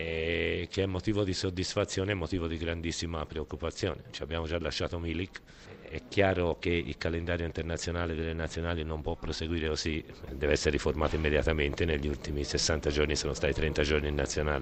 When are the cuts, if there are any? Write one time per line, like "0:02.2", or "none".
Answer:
0:10.3